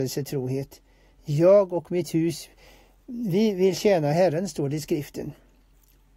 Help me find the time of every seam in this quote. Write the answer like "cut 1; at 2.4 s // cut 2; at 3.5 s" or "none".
none